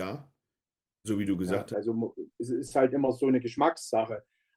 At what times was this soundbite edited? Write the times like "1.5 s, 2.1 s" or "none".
1.7 s